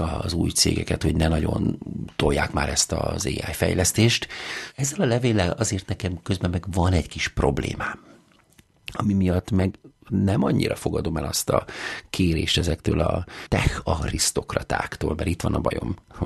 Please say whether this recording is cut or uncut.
uncut